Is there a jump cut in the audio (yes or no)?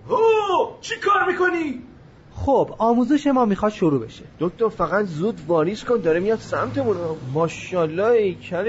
yes